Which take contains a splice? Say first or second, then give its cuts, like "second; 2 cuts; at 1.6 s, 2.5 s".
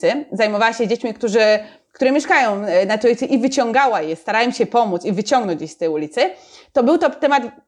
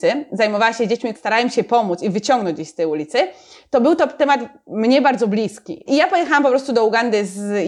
second; 2 cuts; at 1.1 s, 5.9 s